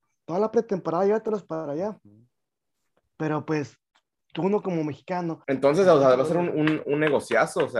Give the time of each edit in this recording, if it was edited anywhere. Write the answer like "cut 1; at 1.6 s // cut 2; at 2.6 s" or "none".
cut 1; at 5.4 s